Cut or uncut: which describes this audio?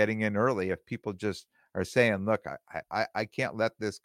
cut